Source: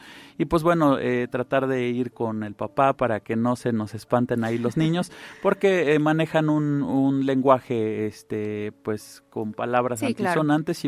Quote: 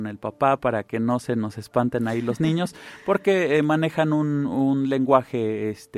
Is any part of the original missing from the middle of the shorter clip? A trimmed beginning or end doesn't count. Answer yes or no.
no